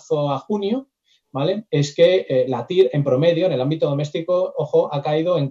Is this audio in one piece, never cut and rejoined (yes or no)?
yes